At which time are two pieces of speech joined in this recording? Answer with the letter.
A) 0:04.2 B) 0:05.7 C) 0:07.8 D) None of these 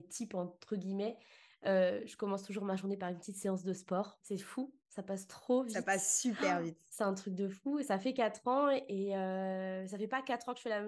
A